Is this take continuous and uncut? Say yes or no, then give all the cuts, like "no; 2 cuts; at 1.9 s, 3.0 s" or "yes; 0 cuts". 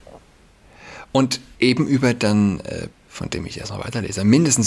no; 1 cut; at 2.9 s